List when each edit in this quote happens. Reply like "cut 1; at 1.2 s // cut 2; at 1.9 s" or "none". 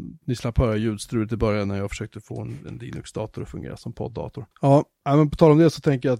cut 1; at 4.5 s